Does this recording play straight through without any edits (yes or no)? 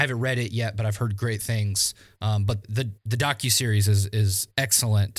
no